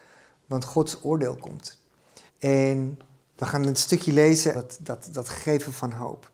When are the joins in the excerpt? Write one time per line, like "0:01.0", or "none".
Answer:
0:02.3
0:04.5

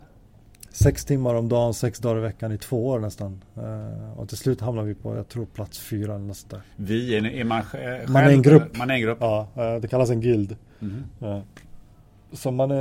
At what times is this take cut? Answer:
none

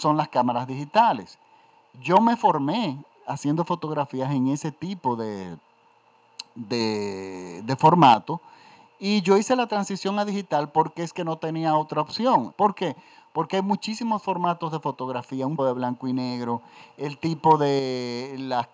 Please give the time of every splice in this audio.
0:12.5
0:15.6

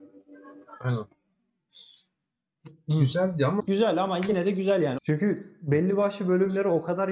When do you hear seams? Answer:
0:03.6
0:05.0

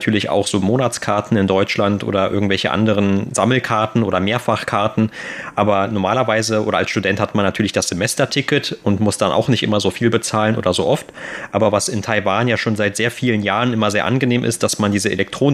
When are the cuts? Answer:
none

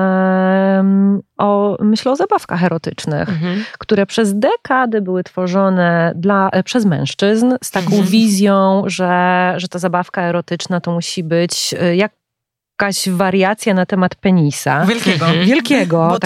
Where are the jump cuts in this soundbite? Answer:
none

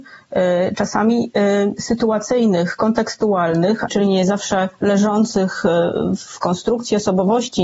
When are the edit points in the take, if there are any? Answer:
0:03.9

